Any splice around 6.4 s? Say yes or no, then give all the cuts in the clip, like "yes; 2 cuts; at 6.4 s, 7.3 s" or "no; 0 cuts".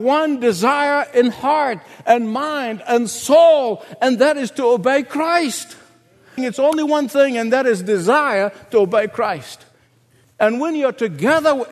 yes; 1 cut; at 6.4 s